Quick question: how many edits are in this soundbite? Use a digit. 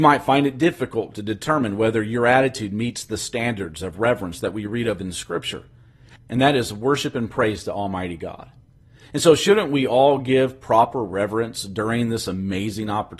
1